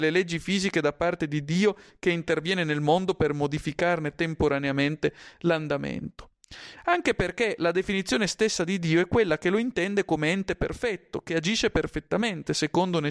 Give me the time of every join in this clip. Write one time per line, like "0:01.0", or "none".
none